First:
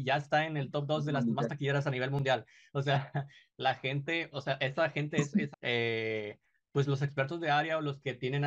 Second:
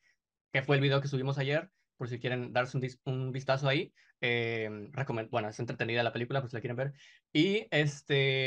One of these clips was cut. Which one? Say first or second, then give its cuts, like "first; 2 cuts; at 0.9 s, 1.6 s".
first; 1 cut; at 5.5 s